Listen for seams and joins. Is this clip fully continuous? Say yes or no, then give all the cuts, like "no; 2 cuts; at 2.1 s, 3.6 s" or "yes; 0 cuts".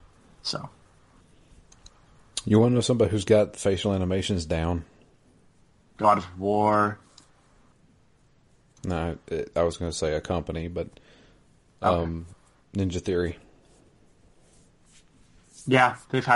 yes; 0 cuts